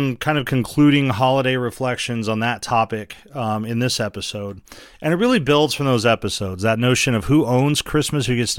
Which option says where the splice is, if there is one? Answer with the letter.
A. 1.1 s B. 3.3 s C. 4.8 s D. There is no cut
D